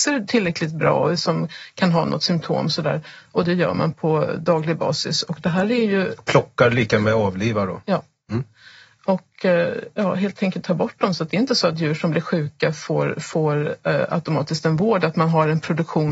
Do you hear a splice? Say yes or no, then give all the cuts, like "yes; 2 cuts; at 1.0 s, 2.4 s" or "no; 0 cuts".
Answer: no; 0 cuts